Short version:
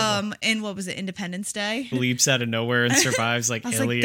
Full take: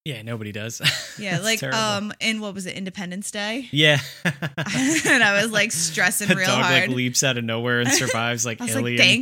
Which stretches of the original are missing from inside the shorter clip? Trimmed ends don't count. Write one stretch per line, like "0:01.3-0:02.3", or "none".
0:03.7-0:06.9